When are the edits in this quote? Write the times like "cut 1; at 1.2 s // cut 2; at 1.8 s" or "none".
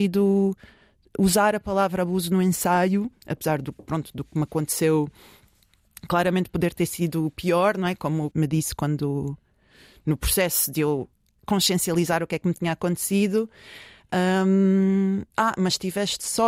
cut 1; at 8.3 s // cut 2; at 15.3 s